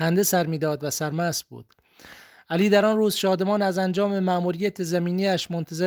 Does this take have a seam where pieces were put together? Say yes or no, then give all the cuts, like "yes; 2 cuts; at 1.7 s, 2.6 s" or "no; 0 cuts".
no; 0 cuts